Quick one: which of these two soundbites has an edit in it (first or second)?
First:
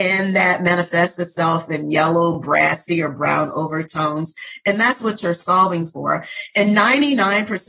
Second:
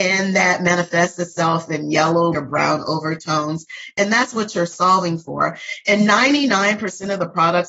second